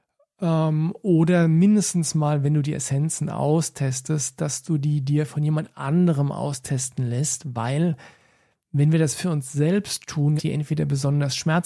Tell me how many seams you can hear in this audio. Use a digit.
1